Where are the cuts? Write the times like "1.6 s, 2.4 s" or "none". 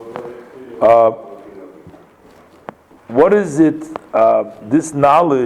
3.0 s